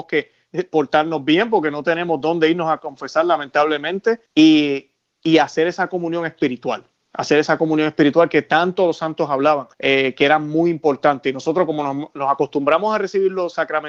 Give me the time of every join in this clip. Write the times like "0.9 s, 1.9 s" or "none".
4.3 s, 9.7 s